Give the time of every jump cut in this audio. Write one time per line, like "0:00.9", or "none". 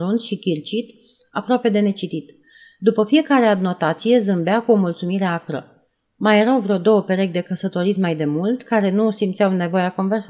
none